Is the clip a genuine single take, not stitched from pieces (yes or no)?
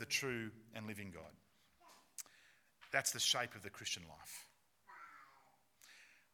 yes